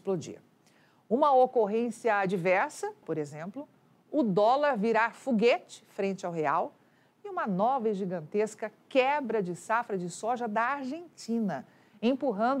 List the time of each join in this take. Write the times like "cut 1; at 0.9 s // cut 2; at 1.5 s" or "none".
cut 1; at 3.0 s